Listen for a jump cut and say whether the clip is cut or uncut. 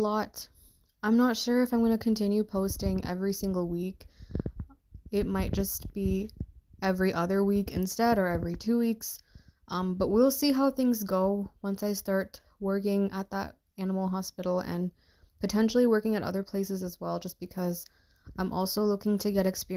uncut